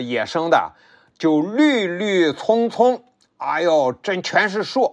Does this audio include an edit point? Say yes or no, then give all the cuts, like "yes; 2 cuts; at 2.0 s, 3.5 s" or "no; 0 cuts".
no; 0 cuts